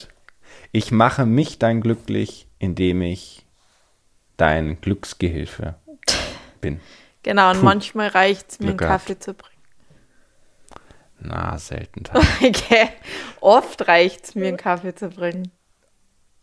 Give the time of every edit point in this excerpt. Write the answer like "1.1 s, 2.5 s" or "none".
none